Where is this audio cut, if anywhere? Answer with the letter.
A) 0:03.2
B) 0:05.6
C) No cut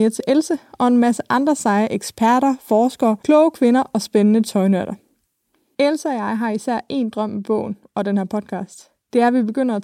A